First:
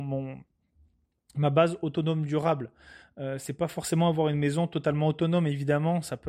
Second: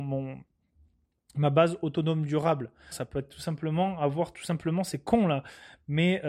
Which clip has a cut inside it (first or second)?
second